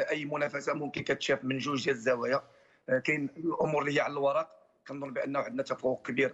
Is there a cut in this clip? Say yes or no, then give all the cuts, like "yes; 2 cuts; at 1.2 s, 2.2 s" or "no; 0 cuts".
yes; 1 cut; at 1.4 s